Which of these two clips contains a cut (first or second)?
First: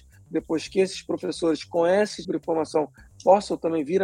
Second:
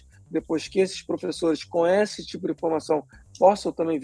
first